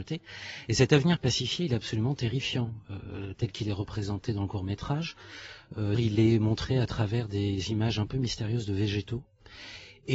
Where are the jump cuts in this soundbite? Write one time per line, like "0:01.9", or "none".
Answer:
0:05.9